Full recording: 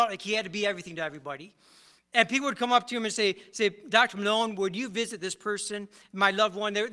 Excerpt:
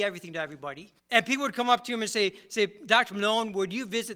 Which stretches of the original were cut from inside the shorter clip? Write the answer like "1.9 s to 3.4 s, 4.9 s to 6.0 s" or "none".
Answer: 1.6 s to 2.0 s